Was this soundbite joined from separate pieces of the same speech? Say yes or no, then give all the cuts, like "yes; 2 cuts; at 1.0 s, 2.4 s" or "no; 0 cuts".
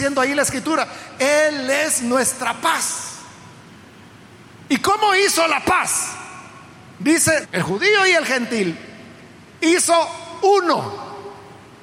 yes; 1 cut; at 7.4 s